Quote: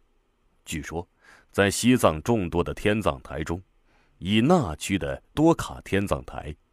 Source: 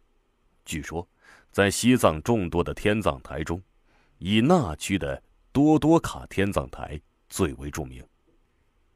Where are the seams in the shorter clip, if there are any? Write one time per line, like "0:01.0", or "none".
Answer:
0:05.4